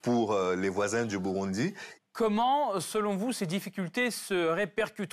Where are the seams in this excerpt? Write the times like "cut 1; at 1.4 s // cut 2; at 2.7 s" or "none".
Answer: cut 1; at 2.0 s

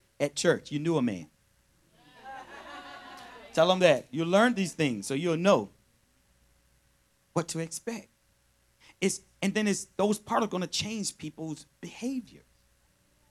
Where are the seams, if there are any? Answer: none

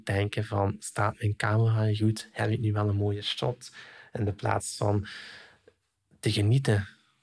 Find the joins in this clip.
none

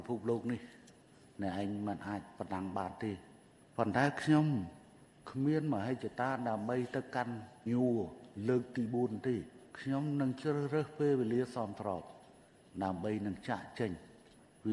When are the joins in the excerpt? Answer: cut 1; at 7.7 s // cut 2; at 9.7 s

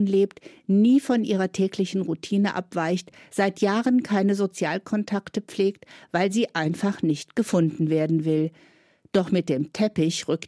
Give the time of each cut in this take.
none

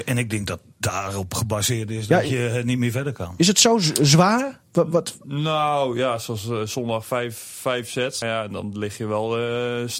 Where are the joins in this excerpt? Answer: cut 1; at 8.2 s

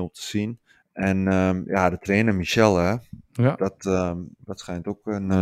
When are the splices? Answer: none

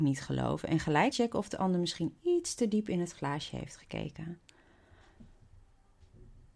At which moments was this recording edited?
cut 1; at 1.1 s

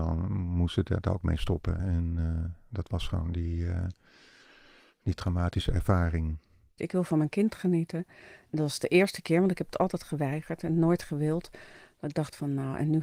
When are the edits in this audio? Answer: cut 1; at 1.8 s // cut 2; at 6.8 s

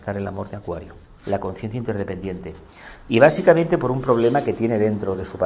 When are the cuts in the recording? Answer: cut 1; at 1.2 s

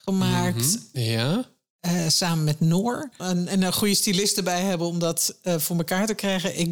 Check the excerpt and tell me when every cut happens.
cut 1; at 0.9 s // cut 2; at 3.2 s

